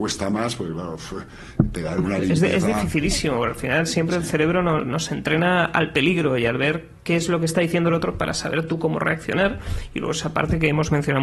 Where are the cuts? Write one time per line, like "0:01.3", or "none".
none